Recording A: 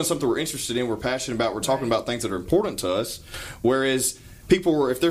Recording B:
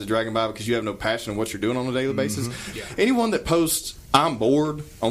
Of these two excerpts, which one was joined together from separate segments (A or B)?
B